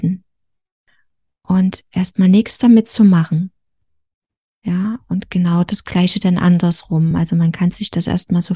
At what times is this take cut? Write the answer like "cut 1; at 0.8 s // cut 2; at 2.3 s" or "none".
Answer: none